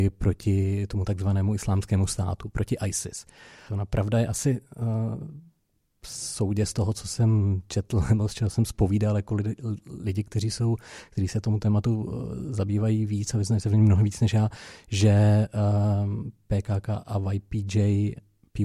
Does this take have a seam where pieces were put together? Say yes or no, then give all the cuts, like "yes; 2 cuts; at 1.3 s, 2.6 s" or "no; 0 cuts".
yes; 1 cut; at 3.7 s